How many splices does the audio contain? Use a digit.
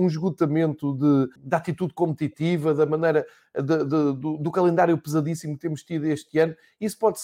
1